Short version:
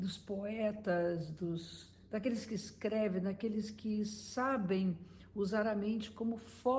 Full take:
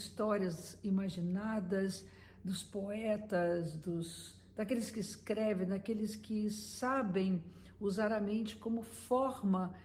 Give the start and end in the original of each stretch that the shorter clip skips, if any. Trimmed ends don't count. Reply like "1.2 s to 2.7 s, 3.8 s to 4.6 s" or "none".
none